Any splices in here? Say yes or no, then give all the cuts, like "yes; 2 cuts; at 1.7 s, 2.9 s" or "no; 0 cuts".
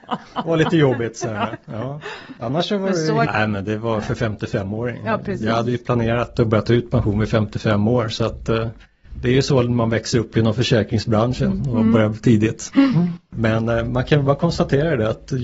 yes; 2 cuts; at 3.3 s, 13.3 s